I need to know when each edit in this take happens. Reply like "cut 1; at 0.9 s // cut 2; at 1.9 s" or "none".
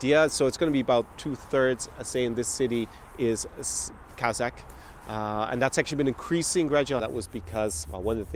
cut 1; at 7.0 s